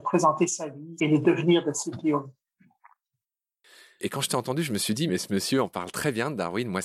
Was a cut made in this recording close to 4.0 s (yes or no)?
yes